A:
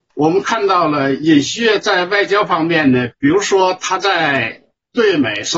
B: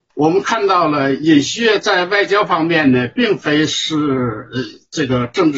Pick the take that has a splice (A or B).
A